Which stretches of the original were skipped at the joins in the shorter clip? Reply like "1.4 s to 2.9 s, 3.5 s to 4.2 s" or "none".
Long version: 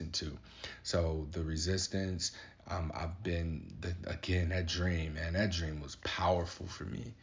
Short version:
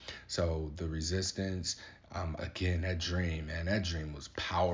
2.9 s to 4.0 s